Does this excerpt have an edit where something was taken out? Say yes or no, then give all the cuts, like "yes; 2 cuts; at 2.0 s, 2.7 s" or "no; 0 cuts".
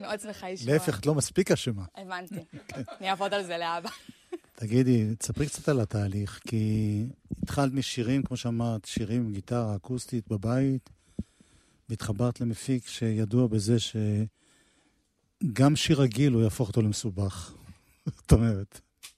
no; 0 cuts